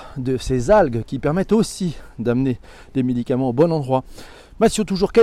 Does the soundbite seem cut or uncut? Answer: uncut